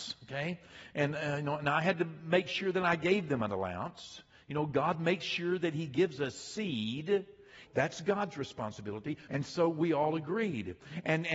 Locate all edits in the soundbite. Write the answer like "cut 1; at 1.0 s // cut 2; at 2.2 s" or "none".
cut 1; at 7.7 s // cut 2; at 9.3 s